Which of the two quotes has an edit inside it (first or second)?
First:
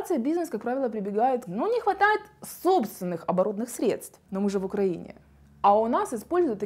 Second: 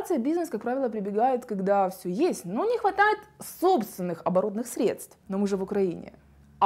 first